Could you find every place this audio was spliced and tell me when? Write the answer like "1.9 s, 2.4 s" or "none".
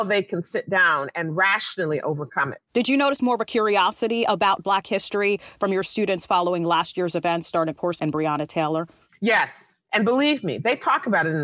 8.0 s, 9.9 s